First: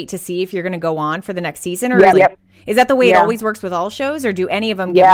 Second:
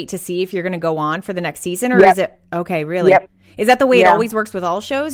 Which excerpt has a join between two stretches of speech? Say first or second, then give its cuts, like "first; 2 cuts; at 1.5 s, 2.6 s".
first; 1 cut; at 2.1 s